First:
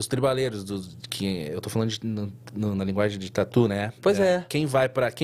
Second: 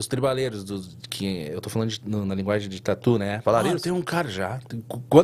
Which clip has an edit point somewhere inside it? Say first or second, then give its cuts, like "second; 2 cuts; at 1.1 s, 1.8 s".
second; 2 cuts; at 2.0 s, 3.4 s